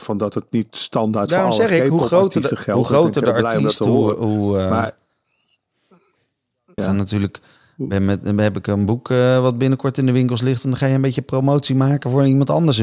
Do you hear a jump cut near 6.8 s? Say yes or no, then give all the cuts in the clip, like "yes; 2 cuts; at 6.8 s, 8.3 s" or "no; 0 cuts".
yes; 1 cut; at 6.8 s